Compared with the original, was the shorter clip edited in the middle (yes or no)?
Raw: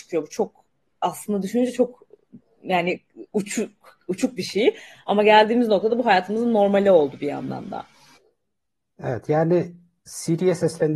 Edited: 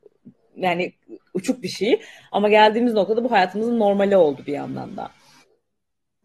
yes